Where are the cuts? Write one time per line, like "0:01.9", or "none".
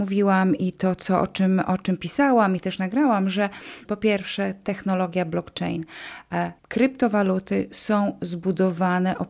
0:03.9
0:06.6